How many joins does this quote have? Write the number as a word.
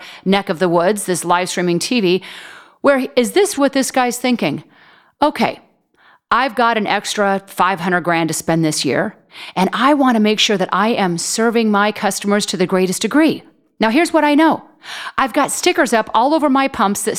one